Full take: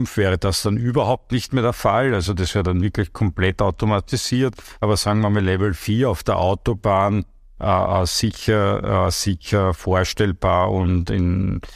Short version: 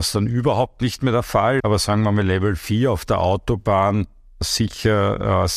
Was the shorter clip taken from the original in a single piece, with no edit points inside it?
no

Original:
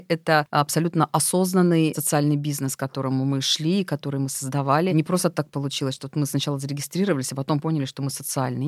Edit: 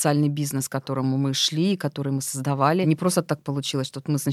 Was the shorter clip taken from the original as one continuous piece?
yes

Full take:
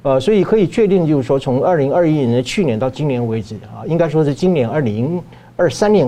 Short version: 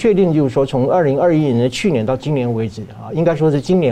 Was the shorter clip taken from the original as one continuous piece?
yes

